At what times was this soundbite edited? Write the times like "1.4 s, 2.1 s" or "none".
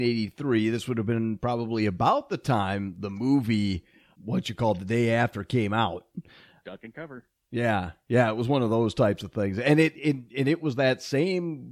4.1 s, 6.6 s